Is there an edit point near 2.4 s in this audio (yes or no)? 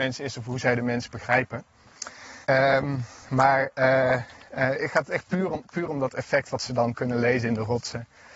yes